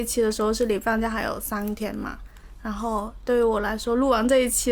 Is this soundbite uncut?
yes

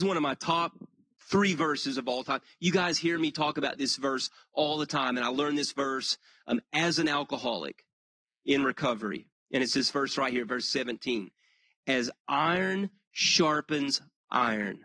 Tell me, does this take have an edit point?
no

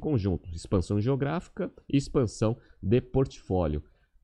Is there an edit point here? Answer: no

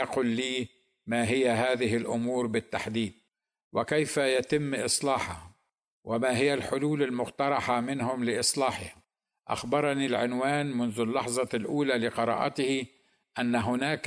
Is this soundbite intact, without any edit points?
yes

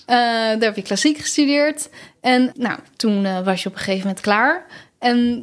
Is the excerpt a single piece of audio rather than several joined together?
yes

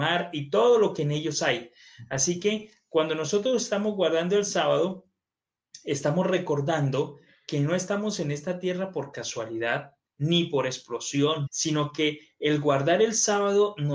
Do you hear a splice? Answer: yes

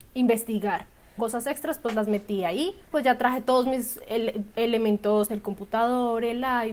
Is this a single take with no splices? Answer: no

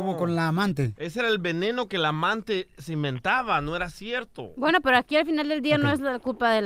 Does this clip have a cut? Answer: no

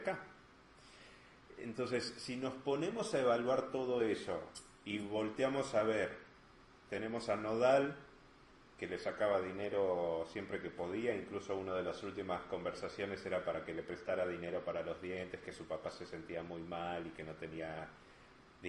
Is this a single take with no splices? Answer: yes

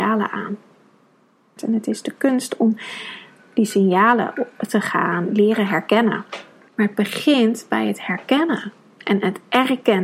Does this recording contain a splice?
yes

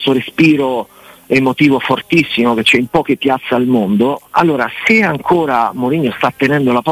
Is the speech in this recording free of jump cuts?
yes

